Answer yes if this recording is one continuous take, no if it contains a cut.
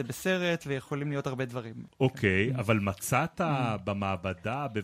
yes